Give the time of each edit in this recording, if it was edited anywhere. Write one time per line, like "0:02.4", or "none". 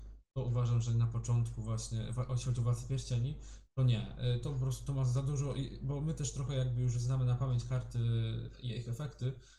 none